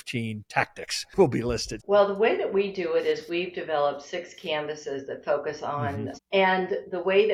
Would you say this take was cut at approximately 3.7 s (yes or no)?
no